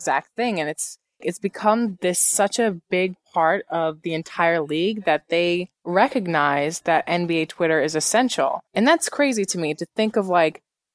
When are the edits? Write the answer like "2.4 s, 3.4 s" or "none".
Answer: 1.2 s, 5.7 s, 8.7 s